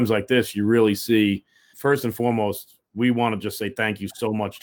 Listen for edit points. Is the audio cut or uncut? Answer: cut